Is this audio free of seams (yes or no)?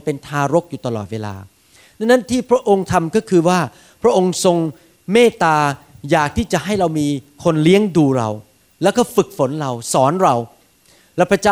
yes